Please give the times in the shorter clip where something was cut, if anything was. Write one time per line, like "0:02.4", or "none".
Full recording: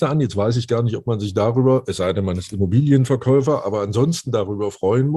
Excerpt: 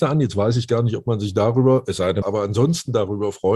0:02.2